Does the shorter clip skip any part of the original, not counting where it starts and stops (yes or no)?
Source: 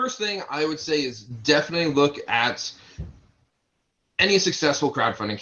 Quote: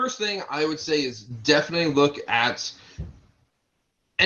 no